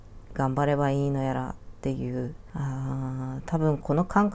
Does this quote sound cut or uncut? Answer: uncut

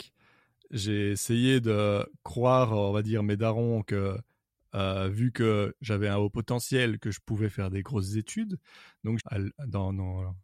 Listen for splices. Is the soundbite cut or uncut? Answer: cut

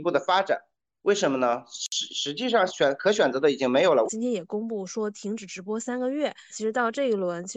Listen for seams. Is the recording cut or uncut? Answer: cut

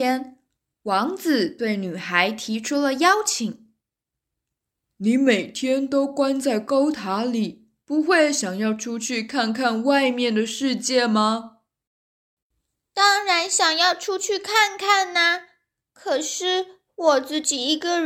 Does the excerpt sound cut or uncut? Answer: uncut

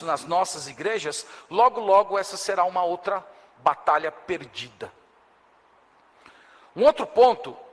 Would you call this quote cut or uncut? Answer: uncut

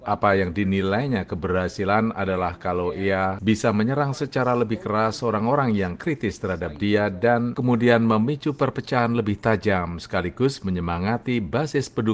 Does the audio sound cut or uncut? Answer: uncut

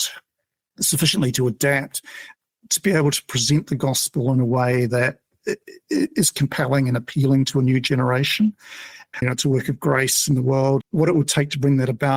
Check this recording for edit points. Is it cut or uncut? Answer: cut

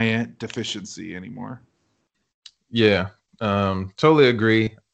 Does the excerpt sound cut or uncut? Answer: uncut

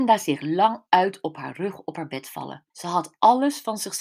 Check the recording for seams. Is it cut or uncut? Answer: cut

